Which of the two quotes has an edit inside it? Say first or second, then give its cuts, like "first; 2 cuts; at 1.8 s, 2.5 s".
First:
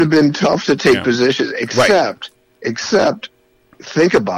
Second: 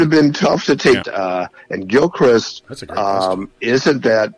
second; 1 cut; at 1.0 s